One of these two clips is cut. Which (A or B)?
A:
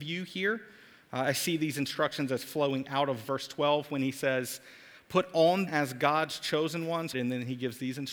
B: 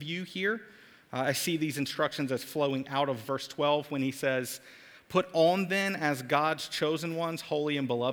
A